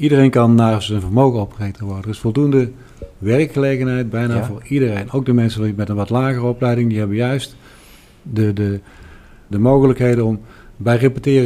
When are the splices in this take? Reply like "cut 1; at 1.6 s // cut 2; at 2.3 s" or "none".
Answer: cut 1; at 9.5 s